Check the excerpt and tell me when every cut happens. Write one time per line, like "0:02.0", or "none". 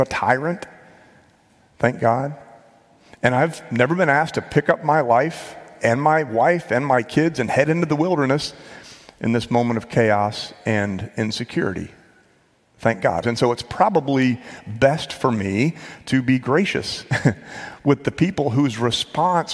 0:13.2